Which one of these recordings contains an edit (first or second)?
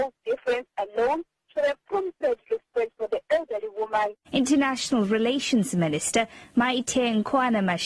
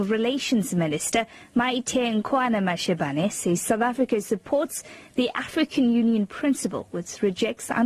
first